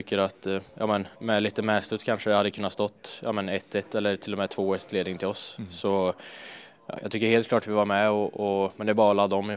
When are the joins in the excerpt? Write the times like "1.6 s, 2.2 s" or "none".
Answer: 1.1 s